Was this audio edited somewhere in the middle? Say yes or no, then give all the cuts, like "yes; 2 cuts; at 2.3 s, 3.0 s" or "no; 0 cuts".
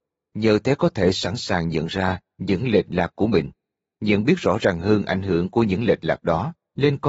no; 0 cuts